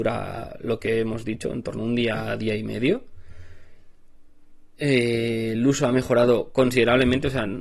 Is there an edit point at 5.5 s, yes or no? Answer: no